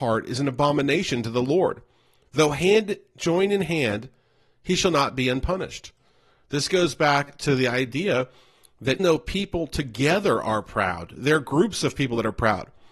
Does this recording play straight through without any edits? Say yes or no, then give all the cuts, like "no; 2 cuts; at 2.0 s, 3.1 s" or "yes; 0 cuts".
no; 1 cut; at 9.0 s